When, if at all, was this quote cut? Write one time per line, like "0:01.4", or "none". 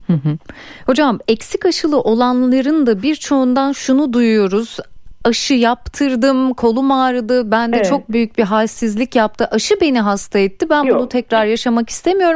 none